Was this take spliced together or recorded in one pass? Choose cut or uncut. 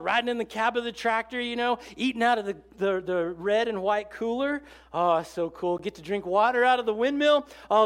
uncut